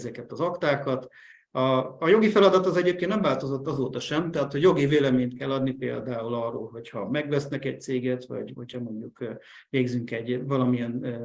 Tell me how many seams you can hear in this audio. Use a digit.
0